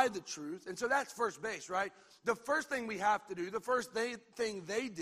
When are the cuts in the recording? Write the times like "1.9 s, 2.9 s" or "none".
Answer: none